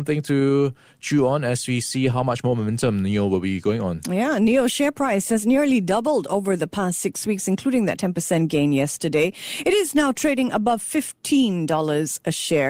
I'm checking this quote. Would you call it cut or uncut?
uncut